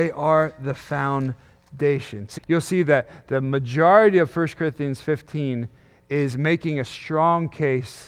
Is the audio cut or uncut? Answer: cut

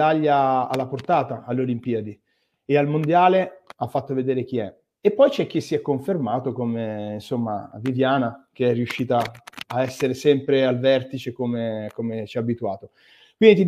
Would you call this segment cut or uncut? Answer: cut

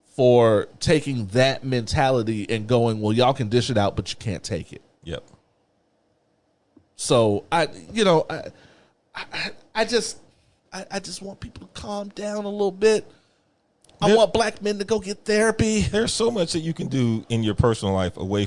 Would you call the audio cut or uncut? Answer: cut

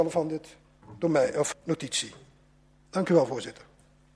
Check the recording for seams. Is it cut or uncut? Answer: cut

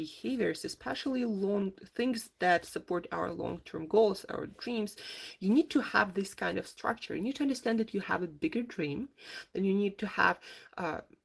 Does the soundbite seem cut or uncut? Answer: uncut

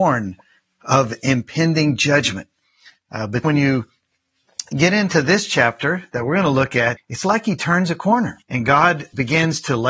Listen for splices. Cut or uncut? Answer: cut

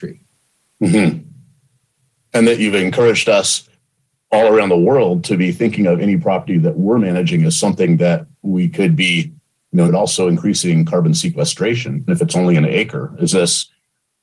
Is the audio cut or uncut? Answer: cut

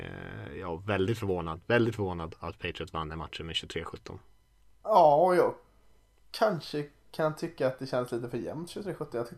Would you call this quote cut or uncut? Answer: uncut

